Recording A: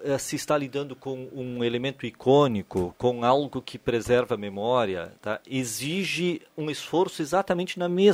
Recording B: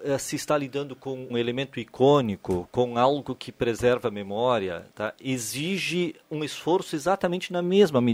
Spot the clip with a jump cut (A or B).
B